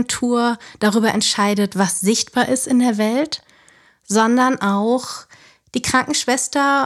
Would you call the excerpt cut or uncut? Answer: uncut